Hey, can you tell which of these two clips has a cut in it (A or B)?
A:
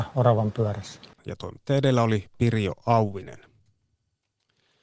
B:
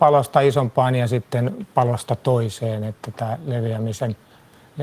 A